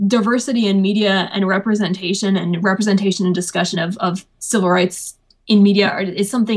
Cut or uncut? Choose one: uncut